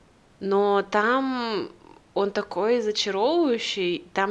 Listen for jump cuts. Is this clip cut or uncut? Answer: uncut